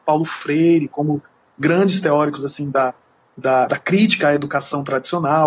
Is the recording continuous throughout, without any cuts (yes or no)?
yes